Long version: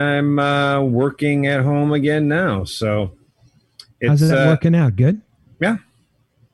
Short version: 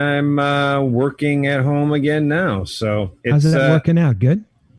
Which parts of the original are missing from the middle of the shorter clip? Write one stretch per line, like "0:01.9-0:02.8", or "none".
0:03.2-0:04.0